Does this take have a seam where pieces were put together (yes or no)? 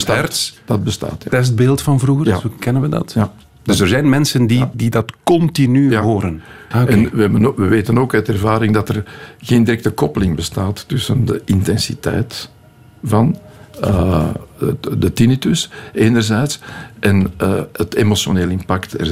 yes